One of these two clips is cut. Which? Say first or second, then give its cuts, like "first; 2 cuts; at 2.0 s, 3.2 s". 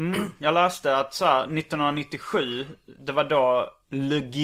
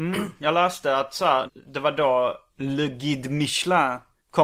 second; 1 cut; at 1.5 s